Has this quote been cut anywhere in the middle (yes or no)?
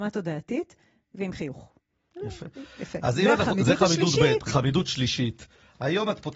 no